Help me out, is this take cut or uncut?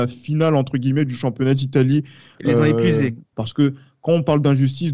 cut